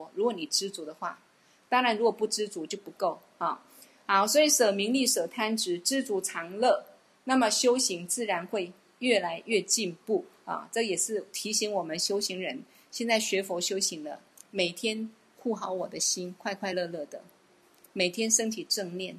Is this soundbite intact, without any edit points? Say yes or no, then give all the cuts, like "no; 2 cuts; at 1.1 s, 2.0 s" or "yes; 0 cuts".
yes; 0 cuts